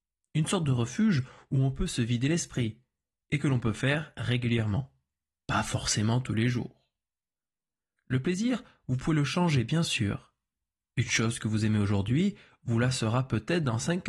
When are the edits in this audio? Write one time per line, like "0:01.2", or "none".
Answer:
none